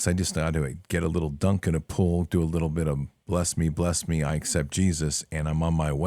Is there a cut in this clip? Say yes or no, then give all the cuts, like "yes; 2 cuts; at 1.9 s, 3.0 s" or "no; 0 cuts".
no; 0 cuts